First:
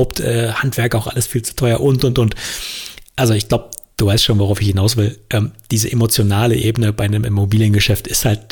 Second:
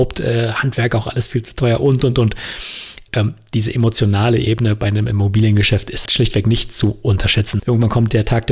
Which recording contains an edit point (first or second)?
second